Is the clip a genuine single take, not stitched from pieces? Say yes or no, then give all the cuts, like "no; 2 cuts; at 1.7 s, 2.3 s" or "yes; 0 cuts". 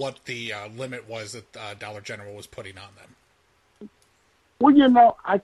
yes; 0 cuts